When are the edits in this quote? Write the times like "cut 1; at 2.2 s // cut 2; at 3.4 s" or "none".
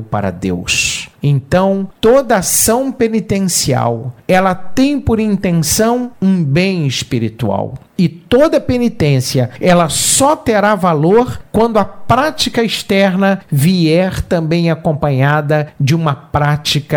none